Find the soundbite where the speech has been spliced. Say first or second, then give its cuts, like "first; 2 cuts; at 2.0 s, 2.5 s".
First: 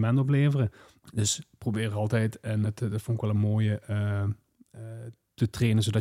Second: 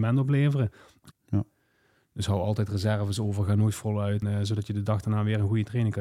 second; 2 cuts; at 1.1 s, 4.2 s